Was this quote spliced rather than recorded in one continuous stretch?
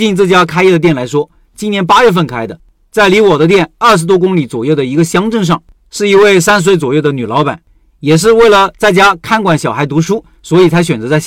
no; 0 cuts

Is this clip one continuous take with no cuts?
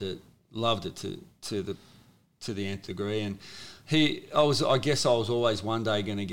yes; 0 cuts

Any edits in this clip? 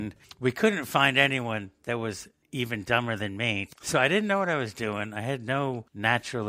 yes; 1 cut; at 3.7 s

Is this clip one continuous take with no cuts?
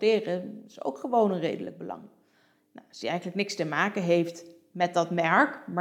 no; 1 cut; at 2.5 s

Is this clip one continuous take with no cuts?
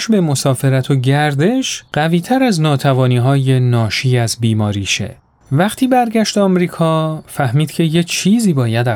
no; 1 cut; at 5.4 s

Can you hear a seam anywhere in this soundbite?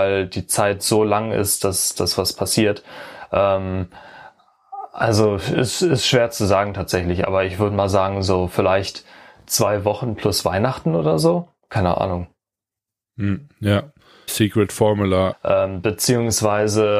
yes; 2 cuts; at 14.3 s, 15.3 s

